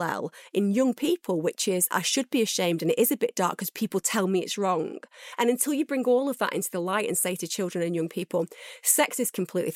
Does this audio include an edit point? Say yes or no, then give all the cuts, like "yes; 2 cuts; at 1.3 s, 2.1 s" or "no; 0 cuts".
no; 0 cuts